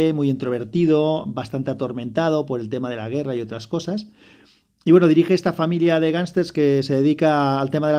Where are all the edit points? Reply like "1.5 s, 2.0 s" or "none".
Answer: none